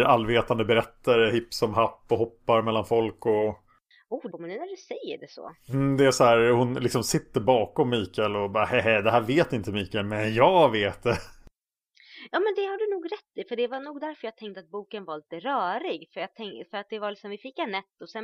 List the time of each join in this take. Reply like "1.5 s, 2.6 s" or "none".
4.3 s